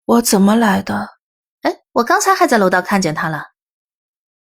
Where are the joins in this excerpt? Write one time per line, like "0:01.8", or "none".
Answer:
0:01.4